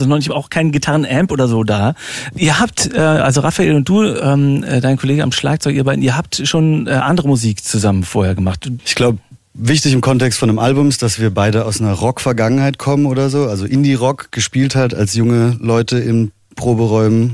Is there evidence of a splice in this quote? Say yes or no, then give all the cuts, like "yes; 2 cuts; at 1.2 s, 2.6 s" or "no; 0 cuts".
yes; 2 cuts; at 2.3 s, 8.8 s